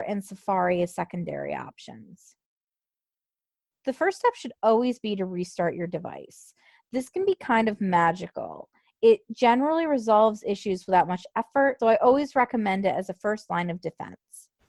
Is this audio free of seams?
no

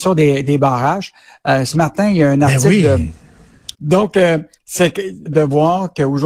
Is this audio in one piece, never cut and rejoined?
no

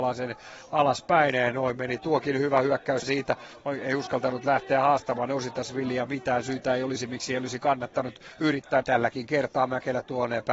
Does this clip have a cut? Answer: yes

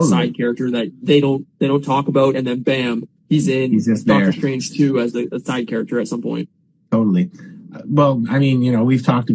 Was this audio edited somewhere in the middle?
yes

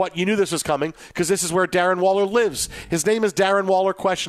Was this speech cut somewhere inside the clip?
no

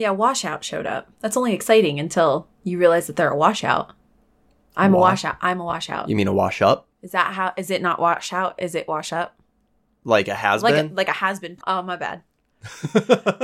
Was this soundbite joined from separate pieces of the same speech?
yes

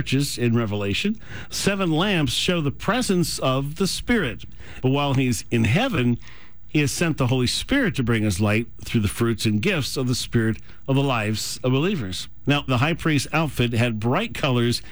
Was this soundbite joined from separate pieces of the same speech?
yes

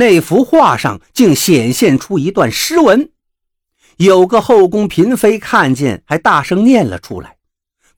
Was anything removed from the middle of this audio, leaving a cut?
no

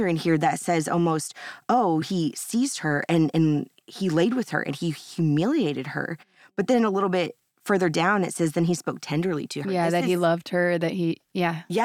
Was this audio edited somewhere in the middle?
yes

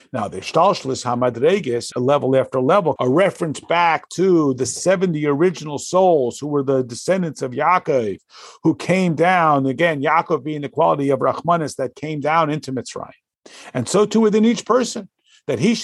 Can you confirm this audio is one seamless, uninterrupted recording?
no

